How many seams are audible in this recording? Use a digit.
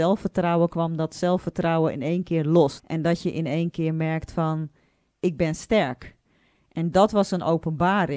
2